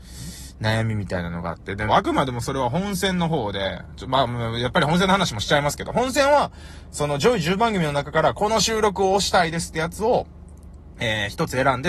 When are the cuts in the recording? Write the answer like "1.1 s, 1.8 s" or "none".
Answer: 1.9 s